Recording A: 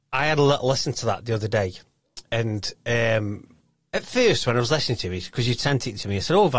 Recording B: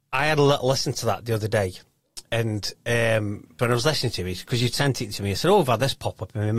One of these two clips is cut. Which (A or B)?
B